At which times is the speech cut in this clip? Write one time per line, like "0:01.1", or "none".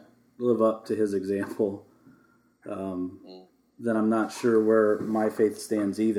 none